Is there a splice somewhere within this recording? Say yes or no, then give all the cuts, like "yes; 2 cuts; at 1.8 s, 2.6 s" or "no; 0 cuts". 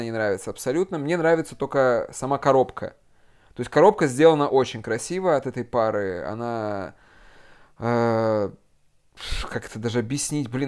no; 0 cuts